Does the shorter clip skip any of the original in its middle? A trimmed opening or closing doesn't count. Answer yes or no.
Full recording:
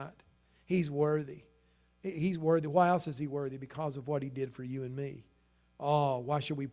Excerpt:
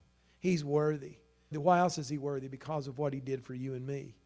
yes